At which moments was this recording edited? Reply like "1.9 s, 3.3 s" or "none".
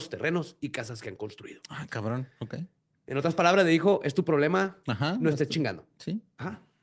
none